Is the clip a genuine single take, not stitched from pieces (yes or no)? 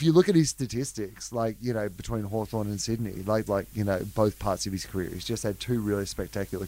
no